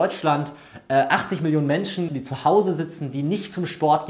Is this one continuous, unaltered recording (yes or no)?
no